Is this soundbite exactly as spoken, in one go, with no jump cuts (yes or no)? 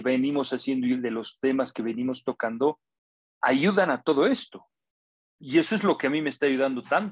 yes